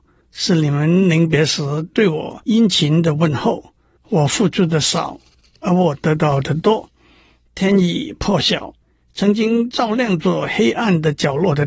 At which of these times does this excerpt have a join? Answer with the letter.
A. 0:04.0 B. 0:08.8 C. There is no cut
A